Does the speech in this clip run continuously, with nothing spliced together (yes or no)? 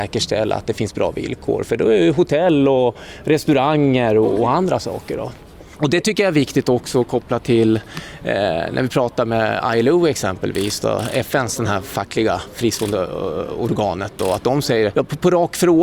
no